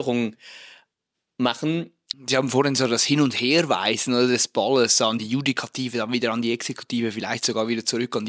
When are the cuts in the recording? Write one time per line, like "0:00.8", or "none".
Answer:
0:02.1